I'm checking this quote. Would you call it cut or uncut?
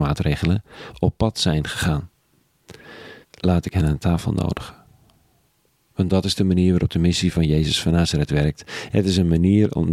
cut